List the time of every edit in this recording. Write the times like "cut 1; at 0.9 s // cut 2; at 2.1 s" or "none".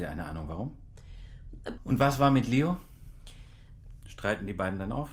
cut 1; at 1.8 s // cut 2; at 4.0 s